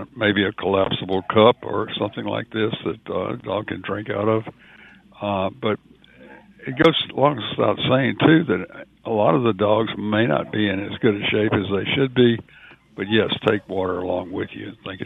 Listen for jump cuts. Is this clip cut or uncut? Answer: cut